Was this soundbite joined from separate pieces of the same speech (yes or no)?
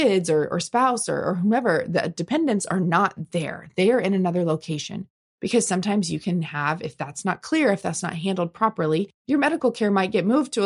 no